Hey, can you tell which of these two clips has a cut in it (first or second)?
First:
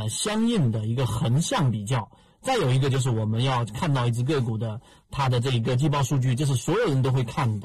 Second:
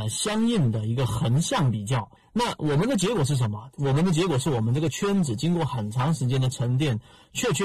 second